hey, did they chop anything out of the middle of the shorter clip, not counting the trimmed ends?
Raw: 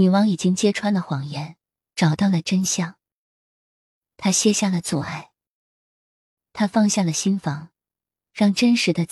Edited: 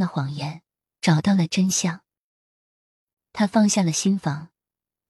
yes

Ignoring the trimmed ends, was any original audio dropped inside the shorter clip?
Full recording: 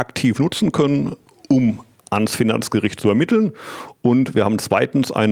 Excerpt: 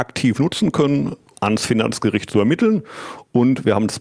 yes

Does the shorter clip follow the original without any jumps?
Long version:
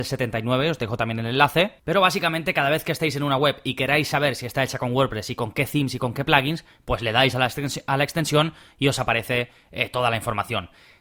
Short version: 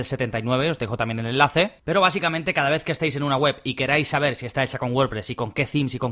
yes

